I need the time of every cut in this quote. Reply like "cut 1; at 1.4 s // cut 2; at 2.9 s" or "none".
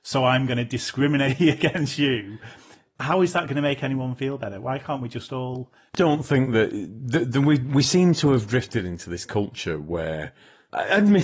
cut 1; at 5.9 s